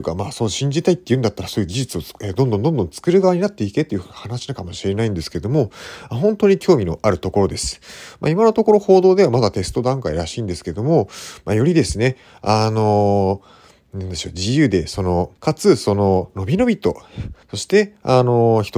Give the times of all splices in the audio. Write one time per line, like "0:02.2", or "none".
0:15.4
0:17.4